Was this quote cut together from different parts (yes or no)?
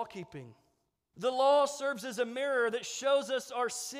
yes